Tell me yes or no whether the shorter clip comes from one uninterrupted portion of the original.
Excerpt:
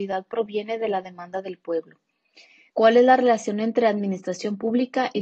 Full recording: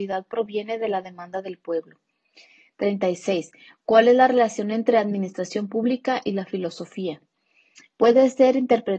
no